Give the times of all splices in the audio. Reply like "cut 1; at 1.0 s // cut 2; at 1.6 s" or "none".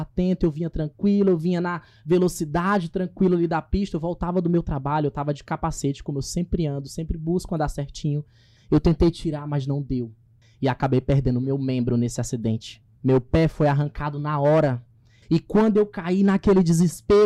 cut 1; at 8.6 s // cut 2; at 10.4 s // cut 3; at 15.2 s